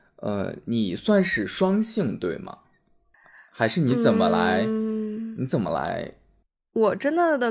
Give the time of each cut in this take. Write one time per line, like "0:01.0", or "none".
none